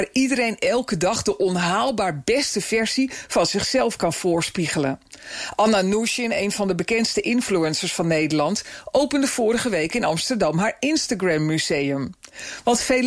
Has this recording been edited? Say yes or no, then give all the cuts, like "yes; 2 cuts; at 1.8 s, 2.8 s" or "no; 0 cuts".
no; 0 cuts